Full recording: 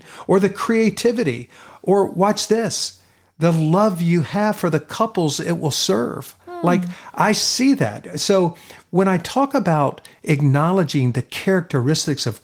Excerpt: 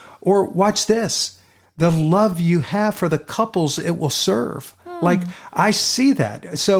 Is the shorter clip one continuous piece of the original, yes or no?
yes